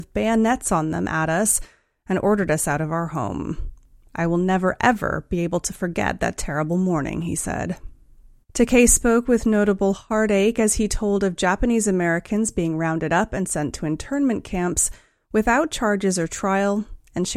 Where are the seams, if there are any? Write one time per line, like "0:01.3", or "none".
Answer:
0:08.4